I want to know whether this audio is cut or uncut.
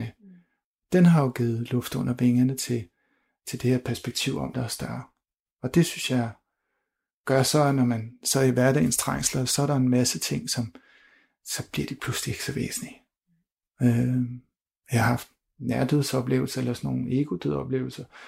cut